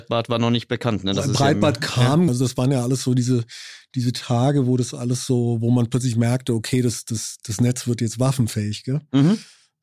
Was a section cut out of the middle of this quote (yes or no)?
yes